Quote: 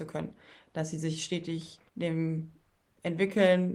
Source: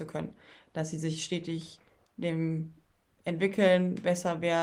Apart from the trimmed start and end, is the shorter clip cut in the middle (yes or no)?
yes